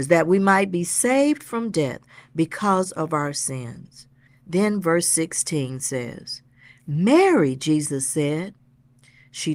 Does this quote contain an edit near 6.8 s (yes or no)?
no